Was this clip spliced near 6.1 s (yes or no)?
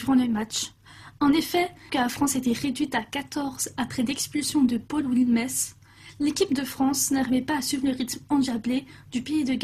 no